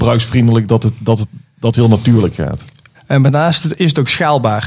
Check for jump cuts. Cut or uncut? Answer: cut